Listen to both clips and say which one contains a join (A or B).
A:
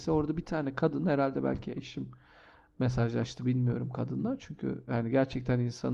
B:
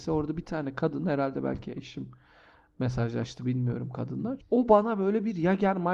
B